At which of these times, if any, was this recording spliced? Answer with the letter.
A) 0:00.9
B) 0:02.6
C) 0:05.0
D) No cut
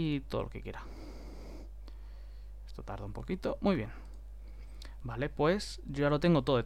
D